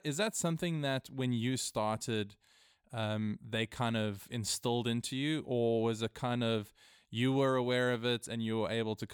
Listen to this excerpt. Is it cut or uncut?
uncut